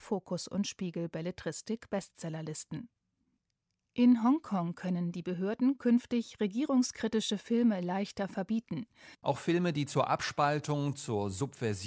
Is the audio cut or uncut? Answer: cut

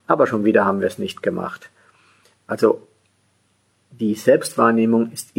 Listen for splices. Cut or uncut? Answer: uncut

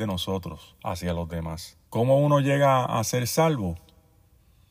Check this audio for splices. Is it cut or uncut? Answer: cut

